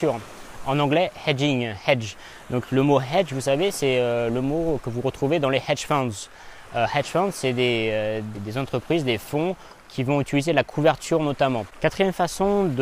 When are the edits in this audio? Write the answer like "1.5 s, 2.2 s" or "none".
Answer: 8.3 s, 11.7 s